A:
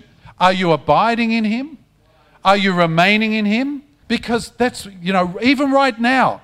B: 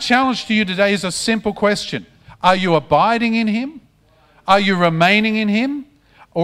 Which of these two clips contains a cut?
A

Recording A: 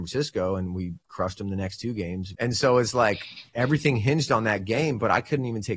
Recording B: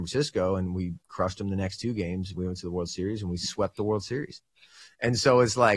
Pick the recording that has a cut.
A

